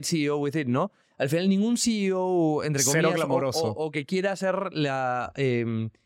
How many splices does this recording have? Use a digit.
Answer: 0